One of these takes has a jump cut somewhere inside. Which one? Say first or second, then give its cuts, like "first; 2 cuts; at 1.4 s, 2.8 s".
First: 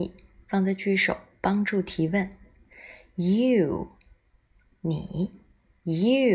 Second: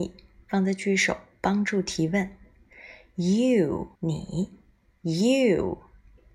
second; 1 cut; at 4.0 s